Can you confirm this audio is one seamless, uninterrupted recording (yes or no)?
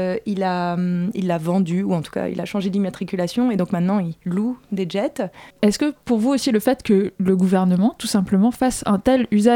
no